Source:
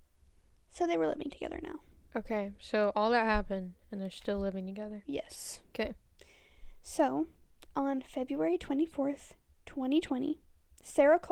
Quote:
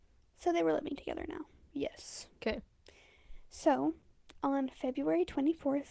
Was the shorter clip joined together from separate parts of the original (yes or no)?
yes